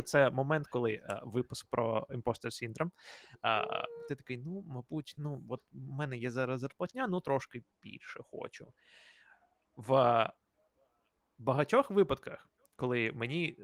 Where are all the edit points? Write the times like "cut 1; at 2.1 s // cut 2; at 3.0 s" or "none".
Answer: cut 1; at 4.1 s